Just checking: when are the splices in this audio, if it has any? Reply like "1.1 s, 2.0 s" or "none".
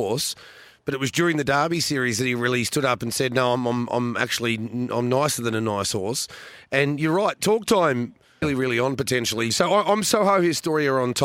8.4 s, 9.5 s